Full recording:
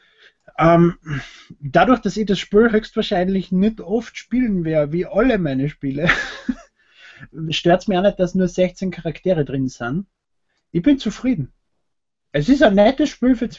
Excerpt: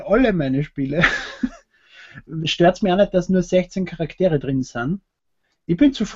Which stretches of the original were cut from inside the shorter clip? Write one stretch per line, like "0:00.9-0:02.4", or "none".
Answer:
none